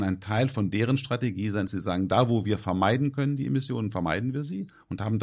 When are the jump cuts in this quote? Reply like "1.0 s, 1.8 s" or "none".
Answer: none